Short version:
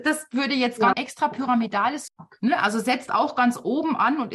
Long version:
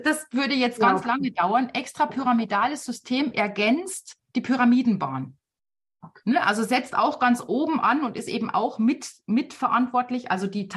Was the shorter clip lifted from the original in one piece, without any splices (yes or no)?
no